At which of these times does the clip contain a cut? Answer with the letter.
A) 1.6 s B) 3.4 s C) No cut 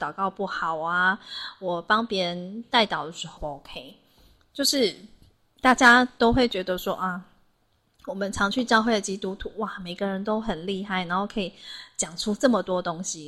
B